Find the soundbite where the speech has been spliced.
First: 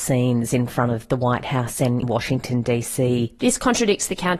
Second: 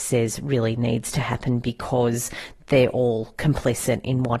first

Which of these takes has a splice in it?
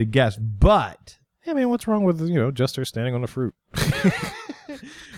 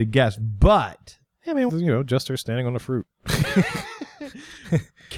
second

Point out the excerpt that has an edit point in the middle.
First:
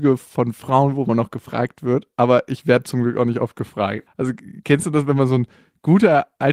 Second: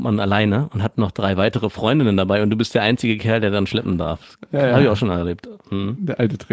first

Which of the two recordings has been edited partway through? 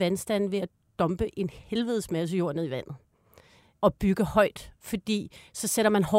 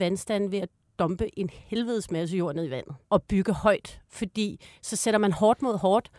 second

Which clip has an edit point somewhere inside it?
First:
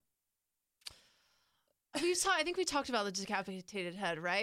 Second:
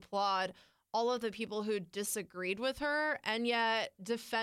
first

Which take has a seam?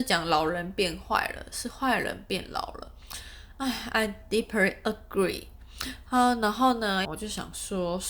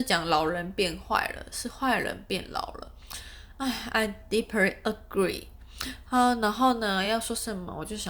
first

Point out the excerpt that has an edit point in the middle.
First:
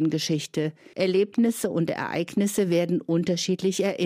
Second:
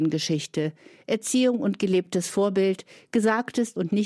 first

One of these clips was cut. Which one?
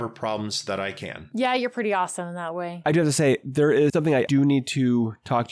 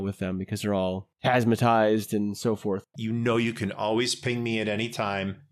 second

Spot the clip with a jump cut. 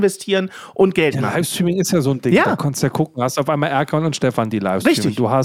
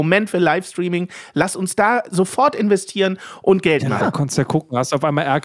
second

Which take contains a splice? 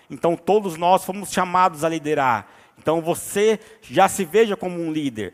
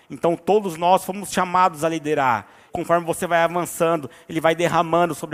second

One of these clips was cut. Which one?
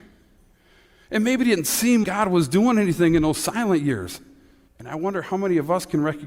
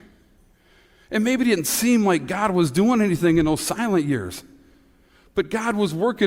first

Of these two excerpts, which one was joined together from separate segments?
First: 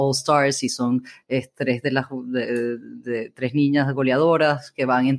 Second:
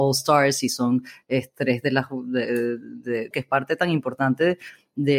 second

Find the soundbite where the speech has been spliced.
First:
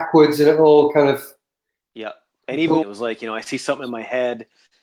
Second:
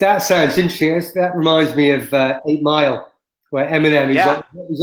first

